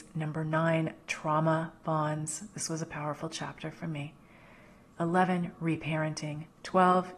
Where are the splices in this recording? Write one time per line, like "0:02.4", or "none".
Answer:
0:04.9